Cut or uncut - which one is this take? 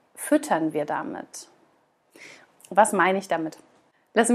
cut